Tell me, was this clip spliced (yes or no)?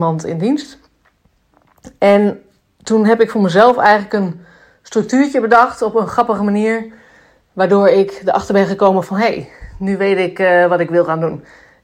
no